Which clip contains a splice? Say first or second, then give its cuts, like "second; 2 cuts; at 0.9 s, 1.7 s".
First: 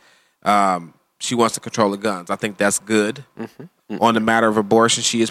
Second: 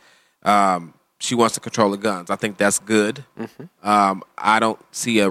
first; 1 cut; at 3.8 s